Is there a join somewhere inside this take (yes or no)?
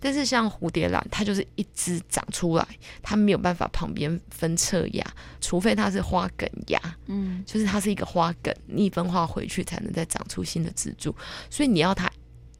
yes